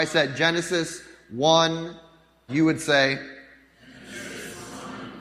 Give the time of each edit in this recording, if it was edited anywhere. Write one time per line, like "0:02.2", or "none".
0:02.5